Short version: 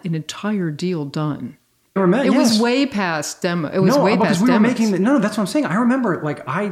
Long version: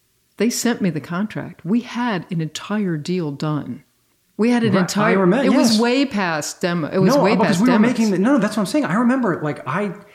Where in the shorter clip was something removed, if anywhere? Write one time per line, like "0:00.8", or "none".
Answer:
0:02.0